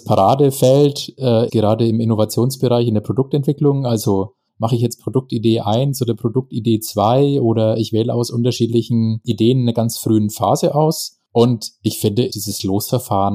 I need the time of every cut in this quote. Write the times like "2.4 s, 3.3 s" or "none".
1.5 s, 12.3 s